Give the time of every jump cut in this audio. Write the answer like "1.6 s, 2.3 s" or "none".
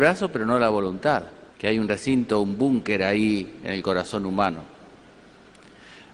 1.5 s